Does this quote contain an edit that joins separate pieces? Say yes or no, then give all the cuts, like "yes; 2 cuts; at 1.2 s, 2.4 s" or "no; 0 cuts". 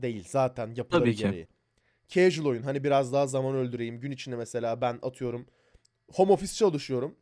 no; 0 cuts